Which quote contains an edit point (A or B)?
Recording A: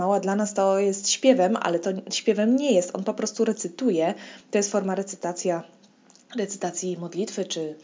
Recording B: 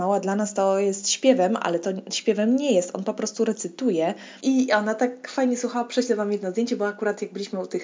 B